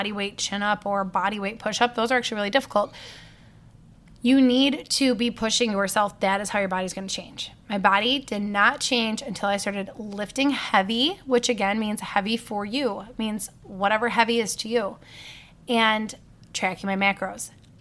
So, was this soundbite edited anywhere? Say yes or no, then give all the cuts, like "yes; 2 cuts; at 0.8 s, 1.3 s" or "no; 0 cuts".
no; 0 cuts